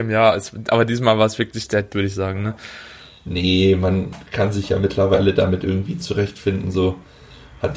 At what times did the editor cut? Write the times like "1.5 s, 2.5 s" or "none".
1.9 s

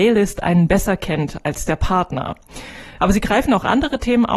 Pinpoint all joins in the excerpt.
3.0 s

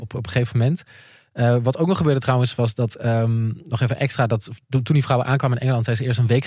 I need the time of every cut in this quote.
none

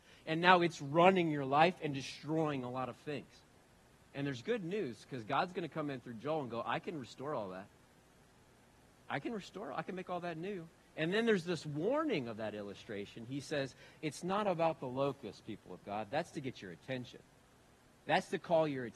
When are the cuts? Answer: 10.8 s

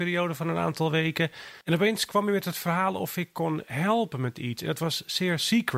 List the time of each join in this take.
1.6 s

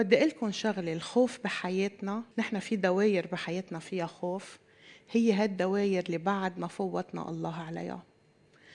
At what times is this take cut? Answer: 2.3 s

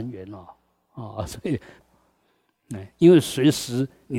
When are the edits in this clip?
1.8 s

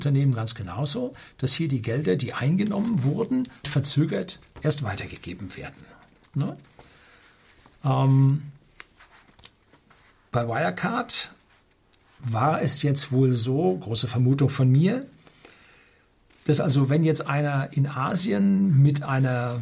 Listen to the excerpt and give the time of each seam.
3.6 s

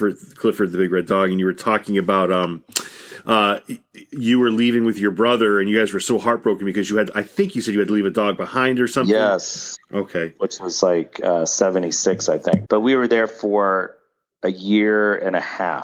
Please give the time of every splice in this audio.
9.8 s, 12.7 s

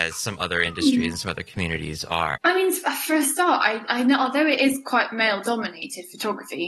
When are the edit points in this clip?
2.3 s

